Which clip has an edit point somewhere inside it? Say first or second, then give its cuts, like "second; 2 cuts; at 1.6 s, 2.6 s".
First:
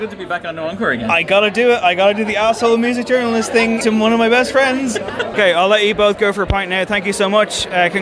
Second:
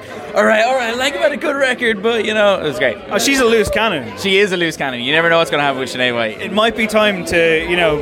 first; 2 cuts; at 3.8 s, 5.3 s